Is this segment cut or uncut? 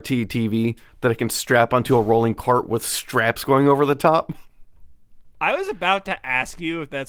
cut